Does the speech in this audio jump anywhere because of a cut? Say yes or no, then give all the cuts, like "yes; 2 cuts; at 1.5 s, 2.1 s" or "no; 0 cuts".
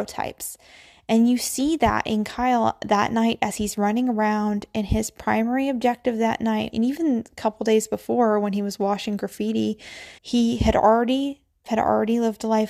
yes; 3 cuts; at 6.7 s, 10.2 s, 11.7 s